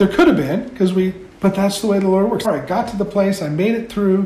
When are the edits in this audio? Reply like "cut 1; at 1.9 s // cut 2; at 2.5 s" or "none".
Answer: cut 1; at 1.3 s // cut 2; at 2.4 s